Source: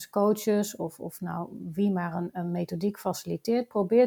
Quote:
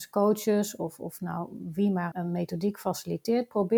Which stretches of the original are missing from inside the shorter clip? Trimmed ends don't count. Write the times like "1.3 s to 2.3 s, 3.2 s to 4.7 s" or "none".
2.1 s to 2.3 s